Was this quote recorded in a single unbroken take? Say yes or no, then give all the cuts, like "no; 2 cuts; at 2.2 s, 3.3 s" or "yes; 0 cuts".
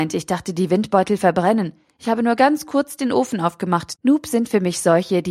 no; 1 cut; at 4.0 s